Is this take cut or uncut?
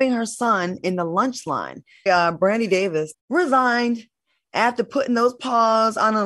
cut